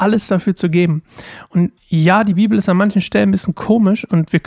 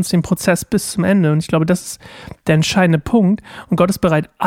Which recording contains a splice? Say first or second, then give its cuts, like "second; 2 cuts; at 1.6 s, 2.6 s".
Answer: first; 1 cut; at 1.8 s